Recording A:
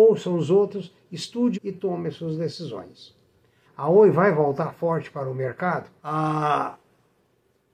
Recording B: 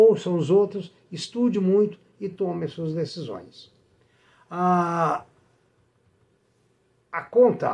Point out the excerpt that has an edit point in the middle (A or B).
A